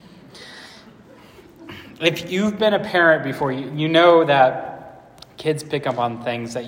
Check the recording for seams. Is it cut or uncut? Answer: uncut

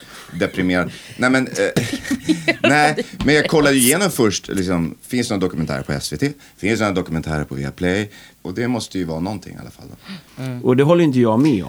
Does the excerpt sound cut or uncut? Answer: cut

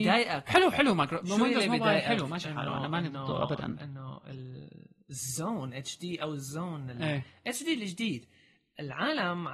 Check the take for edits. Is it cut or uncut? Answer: uncut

